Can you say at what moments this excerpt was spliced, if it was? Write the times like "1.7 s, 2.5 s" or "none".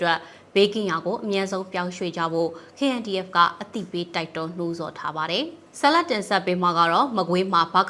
5.7 s

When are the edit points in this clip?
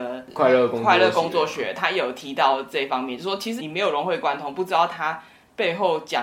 3.6 s

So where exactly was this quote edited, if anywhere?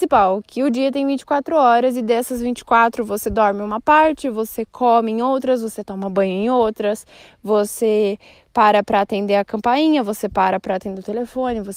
none

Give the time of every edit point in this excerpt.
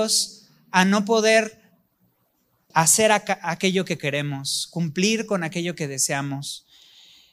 2.7 s

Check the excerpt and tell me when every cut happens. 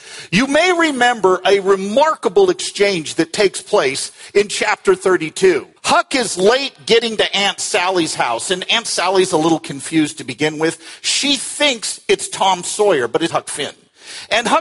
5.8 s, 8.7 s, 13.3 s

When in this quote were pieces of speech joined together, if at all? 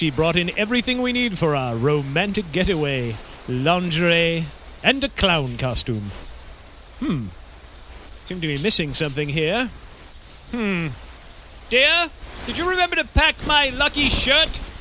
4.8 s

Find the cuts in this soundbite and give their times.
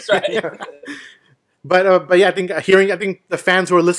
none

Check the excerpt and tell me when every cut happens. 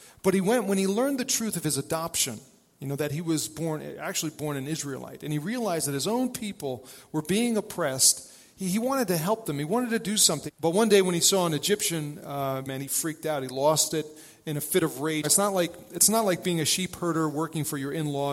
10.5 s, 12.6 s, 15.2 s

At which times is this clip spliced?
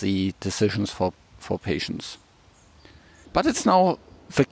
3.2 s

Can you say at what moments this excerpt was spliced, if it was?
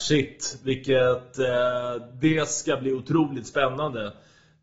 none

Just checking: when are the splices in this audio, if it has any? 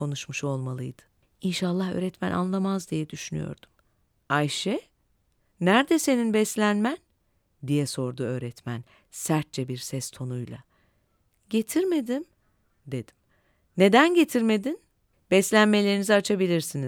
1.2 s, 15.1 s

